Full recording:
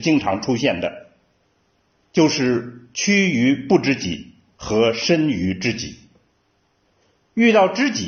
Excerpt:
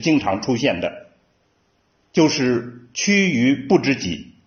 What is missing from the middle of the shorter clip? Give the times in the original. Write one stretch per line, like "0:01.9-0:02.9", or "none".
none